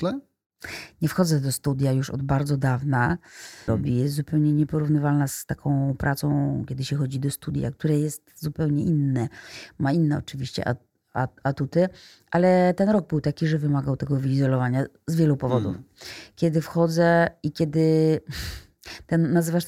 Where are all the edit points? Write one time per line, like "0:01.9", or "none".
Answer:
0:03.7